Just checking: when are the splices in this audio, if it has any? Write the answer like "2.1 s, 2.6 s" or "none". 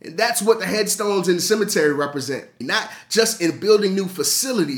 2.6 s